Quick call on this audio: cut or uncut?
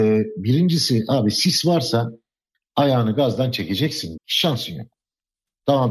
cut